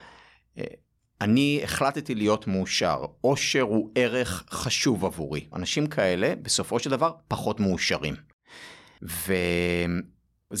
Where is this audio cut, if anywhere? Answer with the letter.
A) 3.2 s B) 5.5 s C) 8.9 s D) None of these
B